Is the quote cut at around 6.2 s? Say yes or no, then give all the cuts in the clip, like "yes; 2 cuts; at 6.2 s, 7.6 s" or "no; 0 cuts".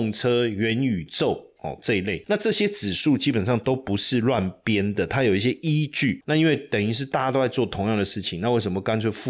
yes; 1 cut; at 6.2 s